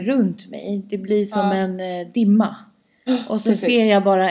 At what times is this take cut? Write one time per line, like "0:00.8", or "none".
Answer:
none